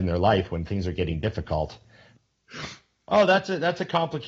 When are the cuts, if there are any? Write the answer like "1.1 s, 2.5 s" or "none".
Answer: 2.2 s